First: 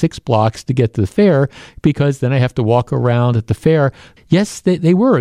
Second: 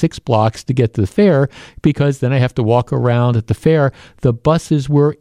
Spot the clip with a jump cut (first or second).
first